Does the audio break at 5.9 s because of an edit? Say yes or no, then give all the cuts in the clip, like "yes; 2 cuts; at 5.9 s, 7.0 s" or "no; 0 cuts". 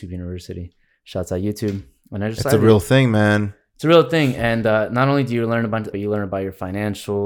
yes; 1 cut; at 5.9 s